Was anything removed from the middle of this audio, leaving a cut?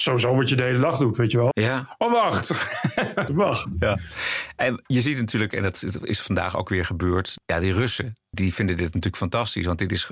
yes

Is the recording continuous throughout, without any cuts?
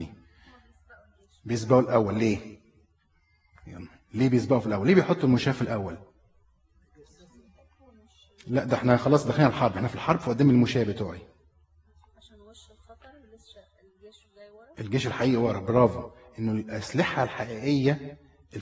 yes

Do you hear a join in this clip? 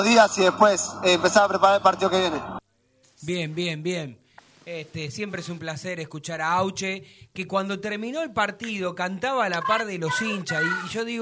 no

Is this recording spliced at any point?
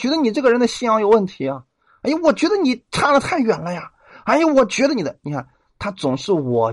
no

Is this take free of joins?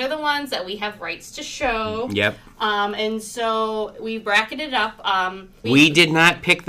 no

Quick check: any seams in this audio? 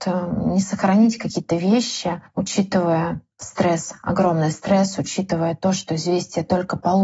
no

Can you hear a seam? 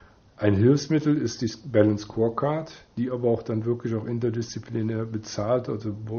no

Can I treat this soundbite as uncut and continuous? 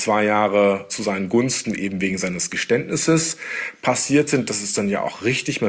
yes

